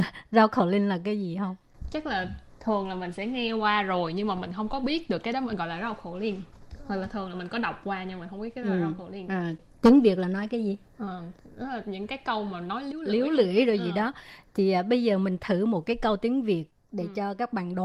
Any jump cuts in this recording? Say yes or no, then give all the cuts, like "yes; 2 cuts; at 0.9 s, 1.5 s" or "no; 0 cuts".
no; 0 cuts